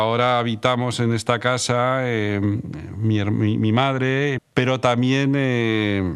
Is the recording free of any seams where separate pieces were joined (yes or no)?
no